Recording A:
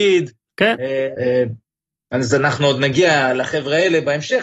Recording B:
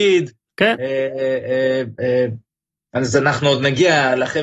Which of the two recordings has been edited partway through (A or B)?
A